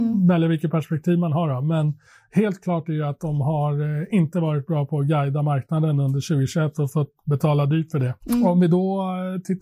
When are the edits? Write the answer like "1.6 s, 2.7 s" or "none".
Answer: 8.2 s